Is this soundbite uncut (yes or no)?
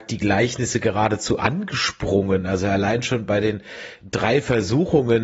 yes